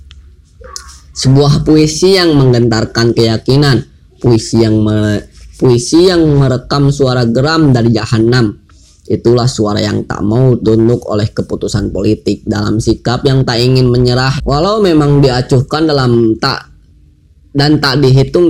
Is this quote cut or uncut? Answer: cut